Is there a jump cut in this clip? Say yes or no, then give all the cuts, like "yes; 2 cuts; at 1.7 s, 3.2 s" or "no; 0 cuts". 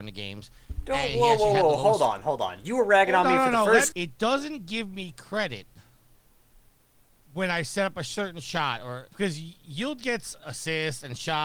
yes; 2 cuts; at 3.9 s, 9.1 s